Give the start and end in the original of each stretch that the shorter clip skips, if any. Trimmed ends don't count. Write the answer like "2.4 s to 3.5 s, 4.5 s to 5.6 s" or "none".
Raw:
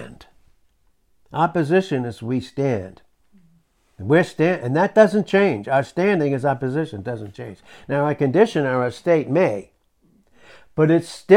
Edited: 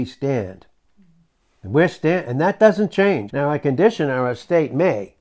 5.6 s to 7.9 s